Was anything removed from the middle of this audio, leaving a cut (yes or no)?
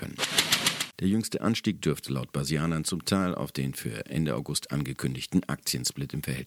yes